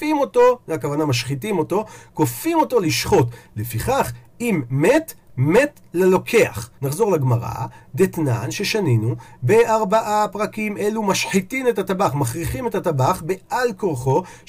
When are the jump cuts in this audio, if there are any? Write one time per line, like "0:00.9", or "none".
0:06.8